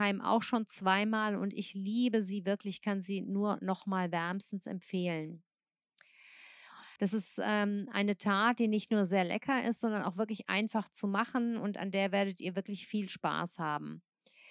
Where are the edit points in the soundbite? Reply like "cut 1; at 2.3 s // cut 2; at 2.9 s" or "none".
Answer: cut 1; at 7.0 s